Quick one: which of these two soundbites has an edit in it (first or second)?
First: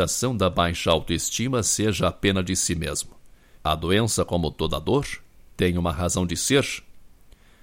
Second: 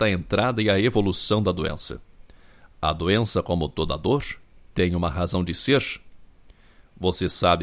first